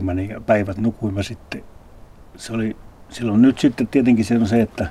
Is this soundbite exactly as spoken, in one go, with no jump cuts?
yes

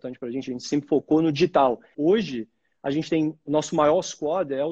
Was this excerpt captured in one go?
no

